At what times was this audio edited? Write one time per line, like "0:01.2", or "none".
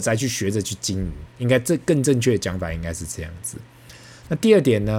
none